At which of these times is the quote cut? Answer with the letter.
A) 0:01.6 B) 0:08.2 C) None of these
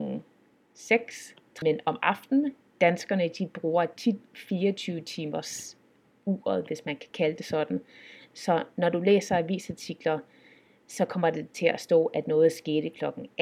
A